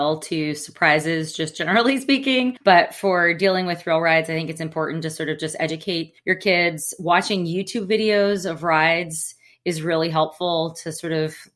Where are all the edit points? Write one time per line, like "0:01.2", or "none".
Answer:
none